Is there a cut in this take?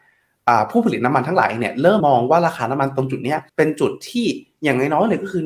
yes; 2 cuts; at 2.0 s, 3.5 s

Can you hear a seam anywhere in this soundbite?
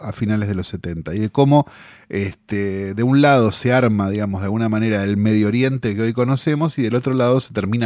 no; 0 cuts

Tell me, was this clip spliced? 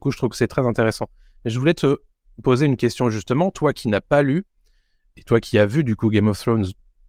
no; 0 cuts

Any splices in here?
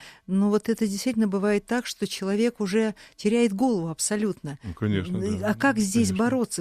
no; 0 cuts

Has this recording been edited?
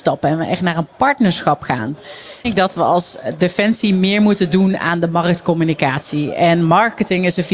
yes; 1 cut; at 2.4 s

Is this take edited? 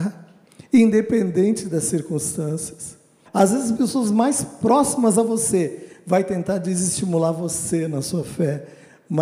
yes; 1 cut; at 3.3 s

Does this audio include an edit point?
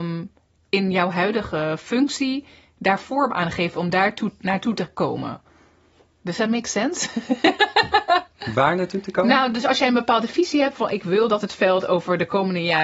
no; 0 cuts

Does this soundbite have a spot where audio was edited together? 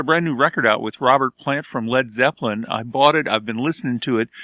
no; 0 cuts

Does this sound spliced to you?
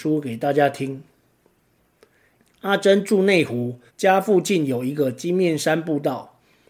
yes; 2 cuts; at 2.4 s, 3.9 s

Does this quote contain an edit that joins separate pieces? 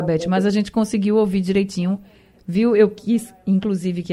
no; 0 cuts

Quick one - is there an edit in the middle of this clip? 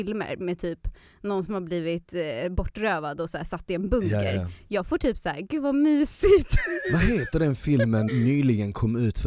yes; 1 cut; at 8.1 s

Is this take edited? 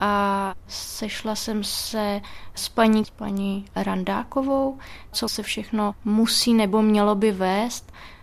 yes; 2 cuts; at 3.0 s, 5.1 s

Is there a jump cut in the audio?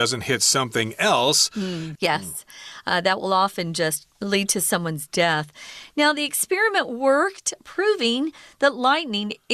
yes; 1 cut; at 2.0 s

